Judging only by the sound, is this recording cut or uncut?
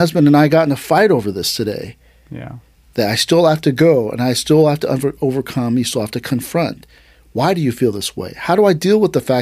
cut